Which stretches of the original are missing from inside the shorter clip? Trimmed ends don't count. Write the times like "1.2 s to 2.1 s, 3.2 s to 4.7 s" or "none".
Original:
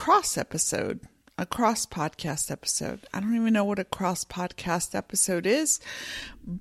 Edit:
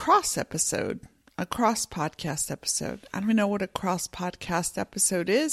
3.3 s to 3.4 s